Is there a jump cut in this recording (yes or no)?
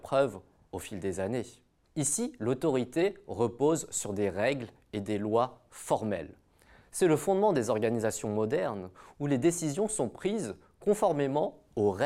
yes